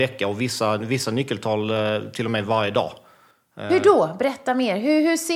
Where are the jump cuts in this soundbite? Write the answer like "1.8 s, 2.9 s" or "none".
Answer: none